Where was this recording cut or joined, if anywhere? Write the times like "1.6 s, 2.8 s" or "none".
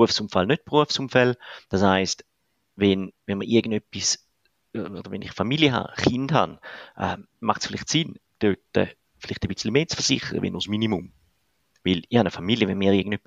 1.6 s